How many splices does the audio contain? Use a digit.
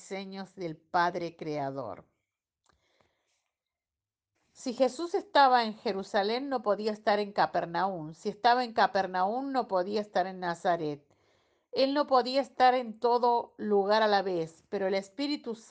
1